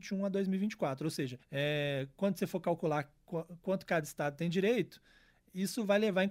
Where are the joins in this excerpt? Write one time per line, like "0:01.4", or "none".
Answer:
0:01.4